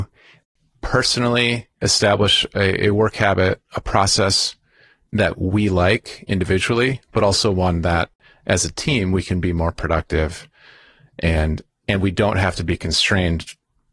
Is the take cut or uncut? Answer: cut